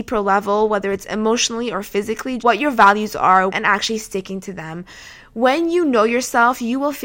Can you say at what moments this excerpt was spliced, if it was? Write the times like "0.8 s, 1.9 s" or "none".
2.4 s, 3.5 s